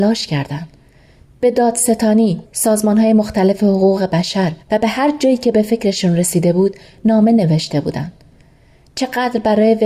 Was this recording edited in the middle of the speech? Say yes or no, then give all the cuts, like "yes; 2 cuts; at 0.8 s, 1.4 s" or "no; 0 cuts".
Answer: yes; 2 cuts; at 2.4 s, 4.6 s